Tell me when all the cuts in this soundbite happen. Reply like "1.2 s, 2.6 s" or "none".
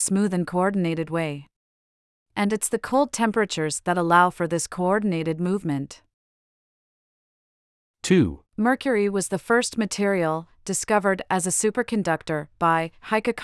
8.4 s